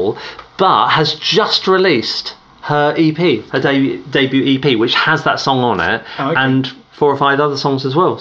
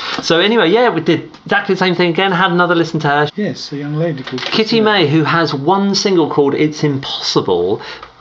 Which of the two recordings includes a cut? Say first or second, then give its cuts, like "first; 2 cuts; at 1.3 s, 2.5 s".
second; 1 cut; at 3.3 s